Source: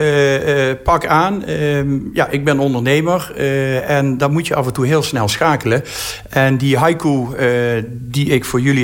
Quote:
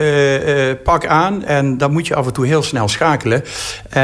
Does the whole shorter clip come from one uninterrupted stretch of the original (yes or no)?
no